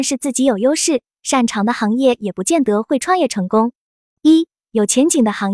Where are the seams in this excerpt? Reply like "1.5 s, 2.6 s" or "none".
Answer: 4.1 s